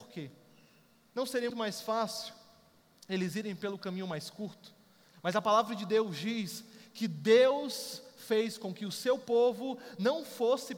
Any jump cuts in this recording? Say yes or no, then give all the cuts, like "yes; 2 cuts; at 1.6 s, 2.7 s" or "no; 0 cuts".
yes; 2 cuts; at 1.5 s, 5.1 s